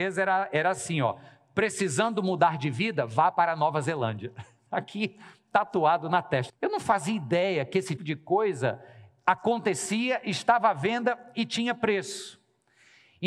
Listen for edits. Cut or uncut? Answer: cut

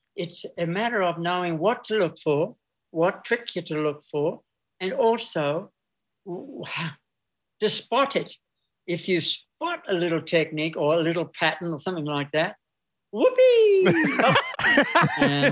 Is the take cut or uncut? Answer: cut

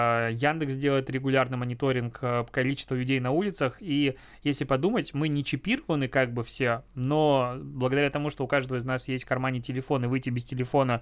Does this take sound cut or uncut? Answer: uncut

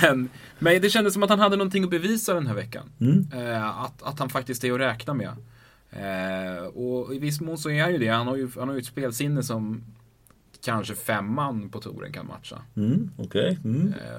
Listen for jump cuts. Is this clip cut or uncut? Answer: uncut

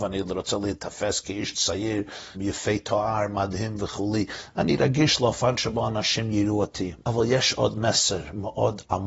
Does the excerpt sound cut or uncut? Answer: cut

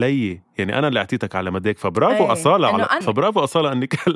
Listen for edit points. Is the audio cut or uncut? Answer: cut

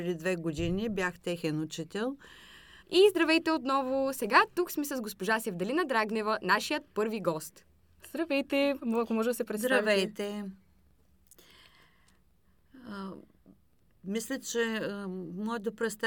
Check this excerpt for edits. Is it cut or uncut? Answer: cut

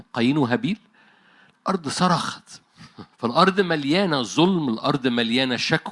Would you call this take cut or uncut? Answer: cut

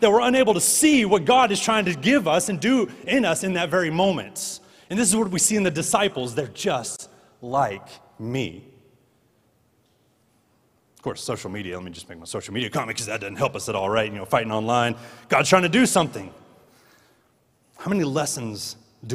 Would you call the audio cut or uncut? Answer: uncut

